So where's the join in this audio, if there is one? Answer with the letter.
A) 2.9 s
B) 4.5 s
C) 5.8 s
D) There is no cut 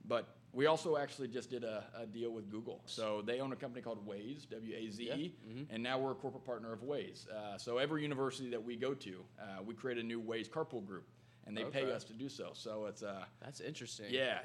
A